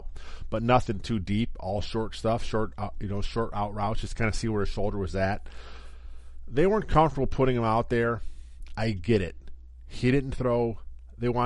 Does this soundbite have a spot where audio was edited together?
no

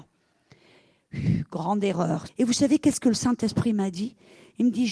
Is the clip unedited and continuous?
no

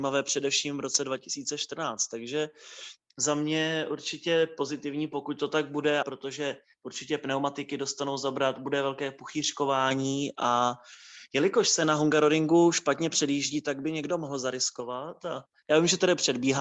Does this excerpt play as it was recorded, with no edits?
no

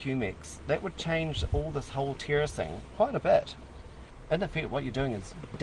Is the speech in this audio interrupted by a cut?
no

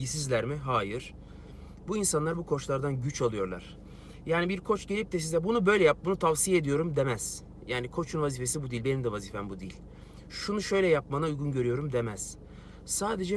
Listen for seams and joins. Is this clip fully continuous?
yes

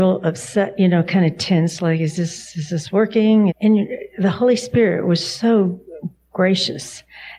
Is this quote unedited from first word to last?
no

